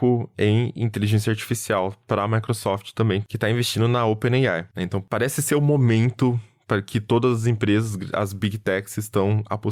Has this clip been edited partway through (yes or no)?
no